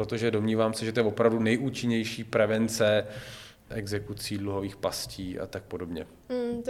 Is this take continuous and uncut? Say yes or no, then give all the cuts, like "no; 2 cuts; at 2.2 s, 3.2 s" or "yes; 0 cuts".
no; 1 cut; at 3.7 s